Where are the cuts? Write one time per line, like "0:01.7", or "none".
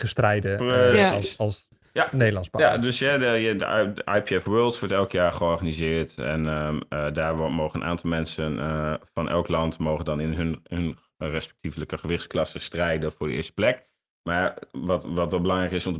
none